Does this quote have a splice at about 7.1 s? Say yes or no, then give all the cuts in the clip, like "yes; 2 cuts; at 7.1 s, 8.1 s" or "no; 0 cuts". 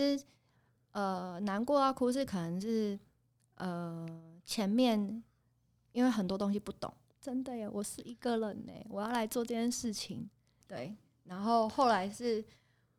yes; 2 cuts; at 7.1 s, 10.6 s